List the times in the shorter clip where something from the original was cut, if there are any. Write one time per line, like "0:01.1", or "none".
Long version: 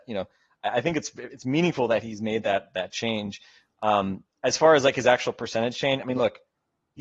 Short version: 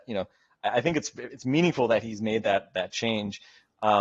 none